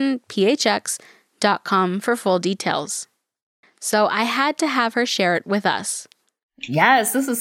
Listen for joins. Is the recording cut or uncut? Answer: cut